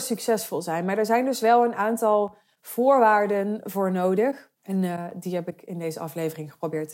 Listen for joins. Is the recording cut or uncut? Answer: cut